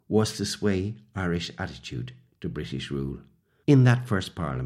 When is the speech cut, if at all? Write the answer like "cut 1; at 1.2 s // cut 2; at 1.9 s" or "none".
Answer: cut 1; at 3.6 s